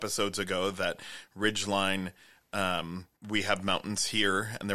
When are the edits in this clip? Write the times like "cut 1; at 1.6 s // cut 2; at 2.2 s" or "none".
cut 1; at 3.2 s